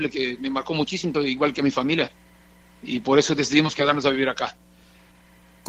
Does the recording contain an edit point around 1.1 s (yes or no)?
yes